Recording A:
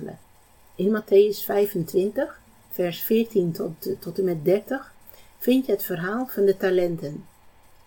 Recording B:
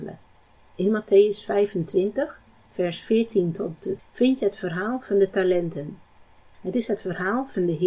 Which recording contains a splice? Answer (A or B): B